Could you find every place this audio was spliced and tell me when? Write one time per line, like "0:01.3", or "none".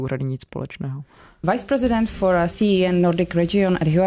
0:01.4